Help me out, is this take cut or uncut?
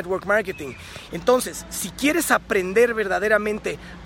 cut